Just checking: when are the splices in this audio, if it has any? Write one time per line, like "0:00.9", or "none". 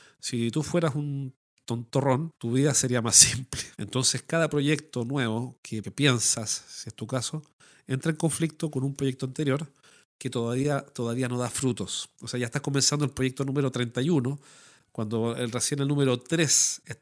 0:03.7